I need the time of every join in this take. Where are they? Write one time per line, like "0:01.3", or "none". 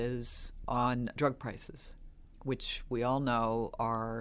none

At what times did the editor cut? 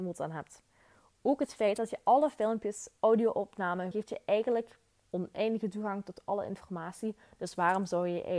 0:03.9

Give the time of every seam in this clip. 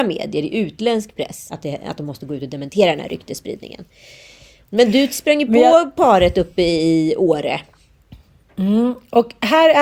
none

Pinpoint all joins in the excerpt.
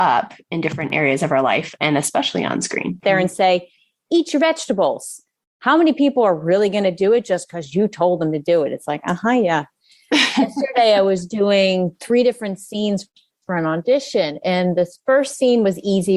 0:03.0

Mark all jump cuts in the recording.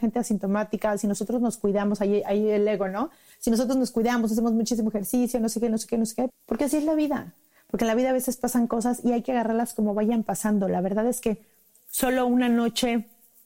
0:06.3

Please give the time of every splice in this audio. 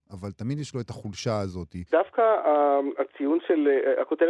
0:01.9

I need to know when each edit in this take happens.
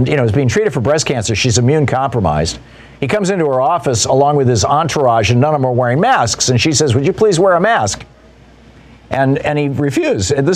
none

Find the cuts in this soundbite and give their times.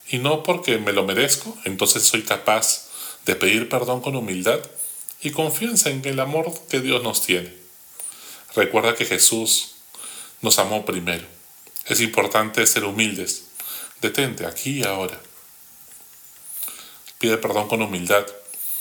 0:11.8
0:13.9
0:17.1

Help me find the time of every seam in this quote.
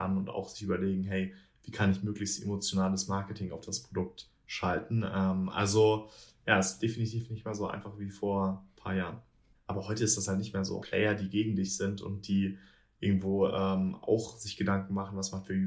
0:09.5
0:10.8

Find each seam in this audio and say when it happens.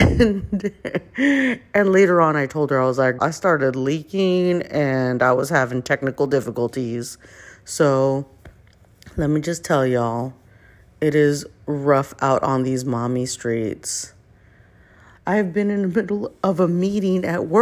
0:03.2
0:15.2

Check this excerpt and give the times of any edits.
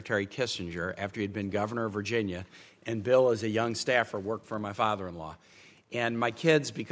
none

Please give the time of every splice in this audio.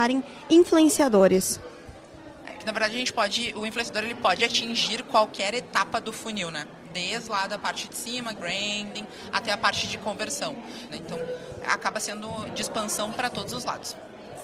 0:08.4
0:10.9

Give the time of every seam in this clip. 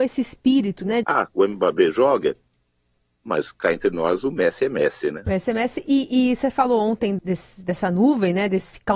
0:01.0
0:05.3
0:07.2

